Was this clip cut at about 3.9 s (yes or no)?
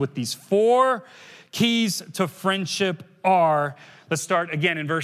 no